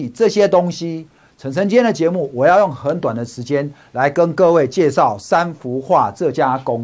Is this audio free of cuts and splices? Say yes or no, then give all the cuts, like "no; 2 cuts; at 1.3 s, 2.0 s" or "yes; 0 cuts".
no; 1 cut; at 1.3 s